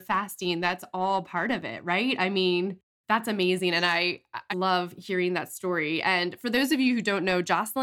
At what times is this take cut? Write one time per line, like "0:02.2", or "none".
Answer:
0:04.5